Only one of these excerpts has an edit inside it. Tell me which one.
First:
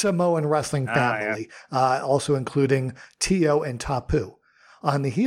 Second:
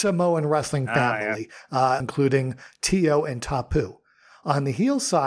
second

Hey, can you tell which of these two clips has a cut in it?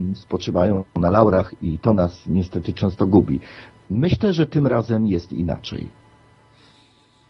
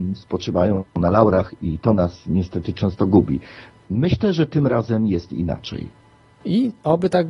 second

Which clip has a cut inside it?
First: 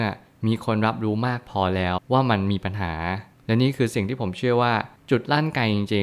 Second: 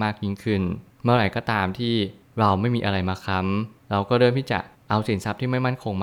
first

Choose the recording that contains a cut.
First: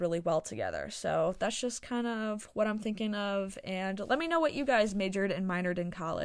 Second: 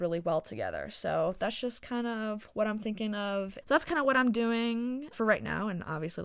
second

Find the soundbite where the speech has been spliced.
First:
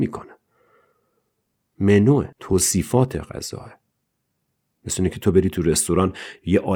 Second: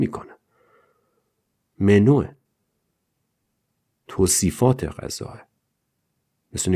first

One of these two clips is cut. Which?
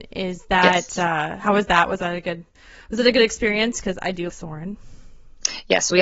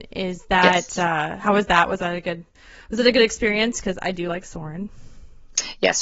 first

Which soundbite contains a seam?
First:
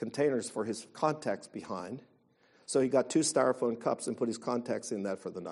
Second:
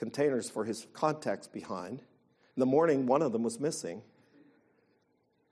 second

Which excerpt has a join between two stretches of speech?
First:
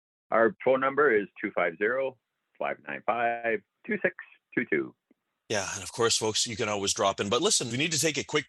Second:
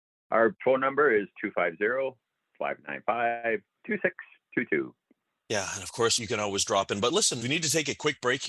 second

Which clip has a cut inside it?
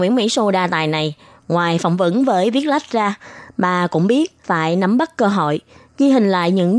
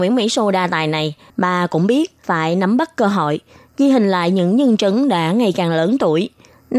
second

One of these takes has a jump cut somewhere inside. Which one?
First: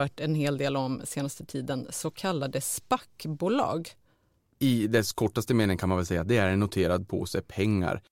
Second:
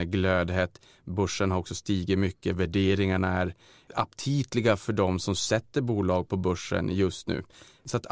first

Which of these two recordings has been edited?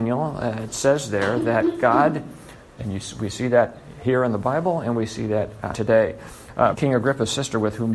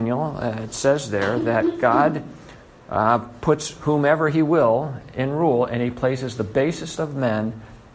first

